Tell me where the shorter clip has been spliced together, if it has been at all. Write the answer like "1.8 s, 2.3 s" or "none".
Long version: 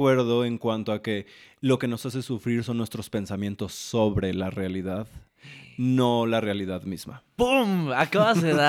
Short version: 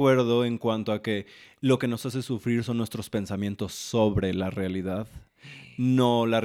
none